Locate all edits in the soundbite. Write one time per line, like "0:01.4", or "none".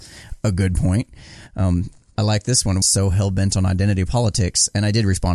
0:02.8